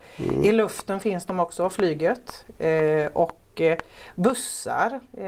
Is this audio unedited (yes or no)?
yes